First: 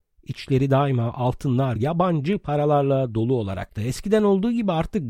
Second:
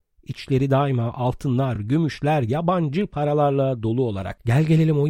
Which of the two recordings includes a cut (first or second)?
first